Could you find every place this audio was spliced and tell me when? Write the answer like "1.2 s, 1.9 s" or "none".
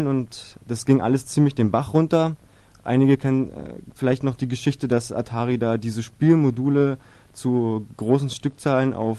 none